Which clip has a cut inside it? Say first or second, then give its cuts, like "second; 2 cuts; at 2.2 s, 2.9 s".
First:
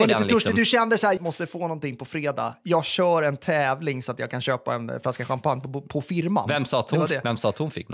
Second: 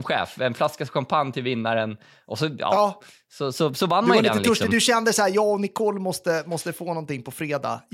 first; 1 cut; at 1.2 s